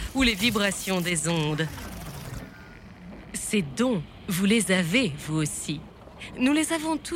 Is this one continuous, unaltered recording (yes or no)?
yes